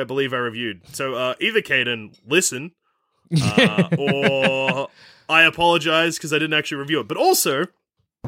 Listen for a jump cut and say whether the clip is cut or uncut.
uncut